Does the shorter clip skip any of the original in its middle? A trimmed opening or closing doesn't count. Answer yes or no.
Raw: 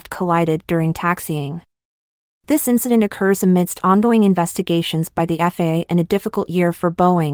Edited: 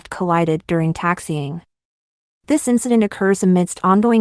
no